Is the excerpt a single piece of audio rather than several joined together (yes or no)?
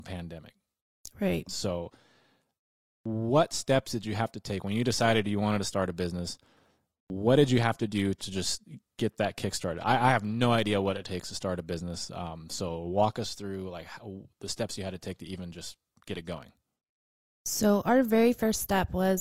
yes